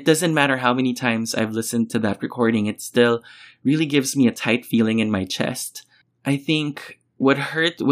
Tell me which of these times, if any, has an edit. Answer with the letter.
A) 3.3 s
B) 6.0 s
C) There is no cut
C